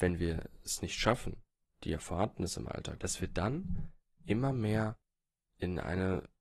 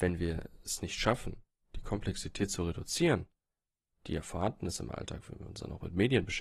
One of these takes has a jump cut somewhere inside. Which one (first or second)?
first